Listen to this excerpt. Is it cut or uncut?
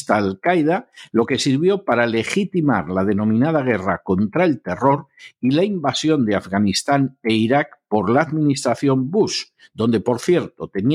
uncut